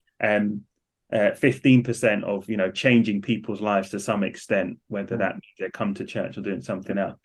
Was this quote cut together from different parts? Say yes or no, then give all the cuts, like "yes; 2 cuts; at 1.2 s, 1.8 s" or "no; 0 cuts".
no; 0 cuts